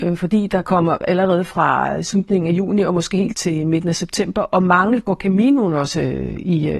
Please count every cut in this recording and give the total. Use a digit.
2